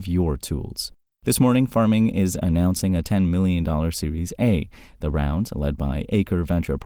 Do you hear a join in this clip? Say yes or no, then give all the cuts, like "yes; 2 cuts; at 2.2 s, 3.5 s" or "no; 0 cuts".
no; 0 cuts